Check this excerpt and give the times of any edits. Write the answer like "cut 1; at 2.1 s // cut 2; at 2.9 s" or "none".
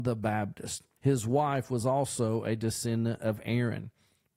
cut 1; at 1.0 s